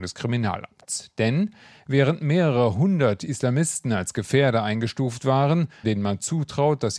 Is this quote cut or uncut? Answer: cut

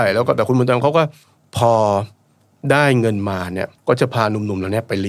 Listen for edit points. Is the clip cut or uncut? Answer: cut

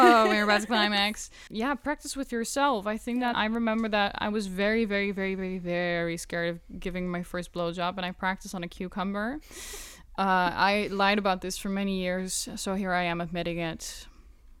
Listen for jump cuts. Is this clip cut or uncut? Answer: cut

